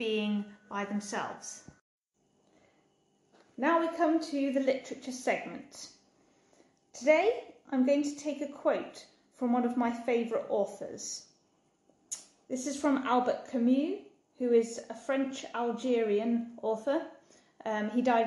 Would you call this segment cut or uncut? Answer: uncut